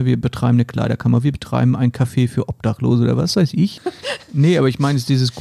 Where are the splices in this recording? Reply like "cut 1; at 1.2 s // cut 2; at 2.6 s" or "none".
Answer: cut 1; at 3.8 s